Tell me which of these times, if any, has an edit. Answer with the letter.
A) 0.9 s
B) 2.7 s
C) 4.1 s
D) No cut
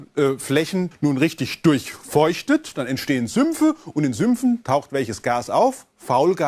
A